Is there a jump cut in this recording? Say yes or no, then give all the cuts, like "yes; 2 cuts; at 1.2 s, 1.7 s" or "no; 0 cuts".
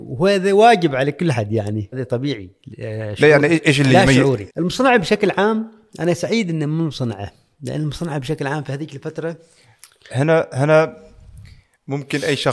yes; 2 cuts; at 1.9 s, 4.5 s